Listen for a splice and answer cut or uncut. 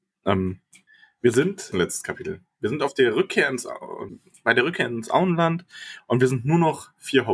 cut